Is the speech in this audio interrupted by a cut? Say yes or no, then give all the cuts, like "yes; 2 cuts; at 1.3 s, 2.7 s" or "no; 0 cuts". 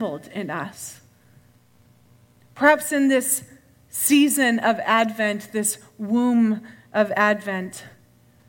no; 0 cuts